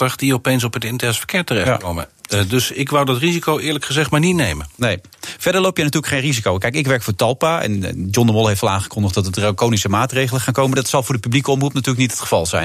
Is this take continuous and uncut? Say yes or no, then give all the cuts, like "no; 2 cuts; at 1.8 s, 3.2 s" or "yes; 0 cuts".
yes; 0 cuts